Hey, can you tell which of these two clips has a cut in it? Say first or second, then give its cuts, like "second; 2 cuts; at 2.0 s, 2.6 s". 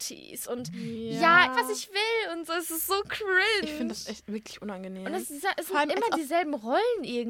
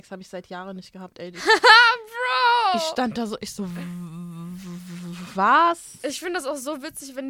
first; 1 cut; at 1.5 s